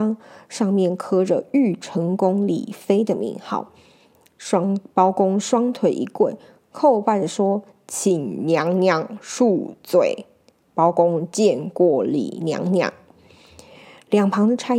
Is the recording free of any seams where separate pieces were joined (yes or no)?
yes